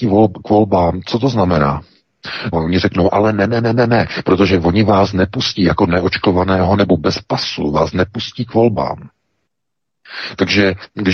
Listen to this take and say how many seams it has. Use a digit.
2